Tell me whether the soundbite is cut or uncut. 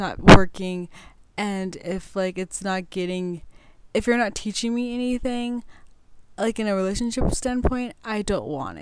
uncut